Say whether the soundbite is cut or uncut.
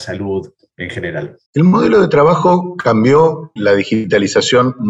cut